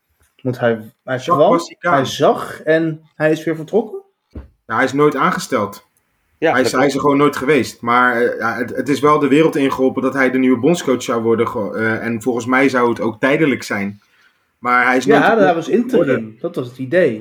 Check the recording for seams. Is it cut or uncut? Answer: uncut